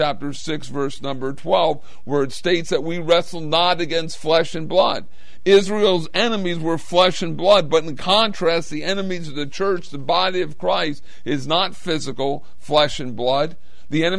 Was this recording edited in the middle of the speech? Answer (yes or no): no